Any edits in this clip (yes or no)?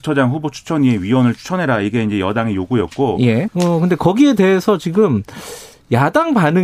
yes